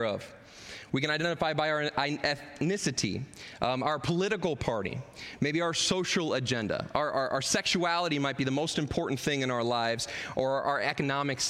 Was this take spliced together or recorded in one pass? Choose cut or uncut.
uncut